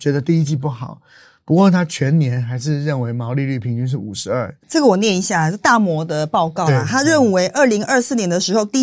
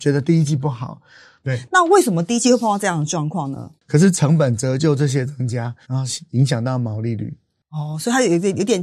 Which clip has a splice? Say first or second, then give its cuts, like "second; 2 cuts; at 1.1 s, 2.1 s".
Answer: second; 3 cuts; at 1.4 s, 3.8 s, 5.8 s